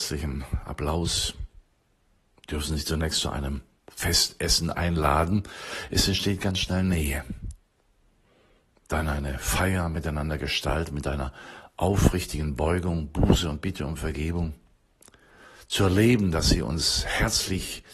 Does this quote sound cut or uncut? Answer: uncut